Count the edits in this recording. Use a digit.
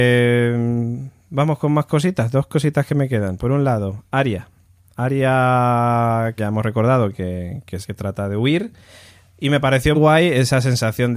3